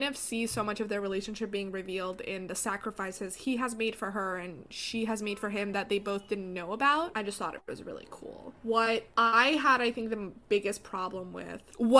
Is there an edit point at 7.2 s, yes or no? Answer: no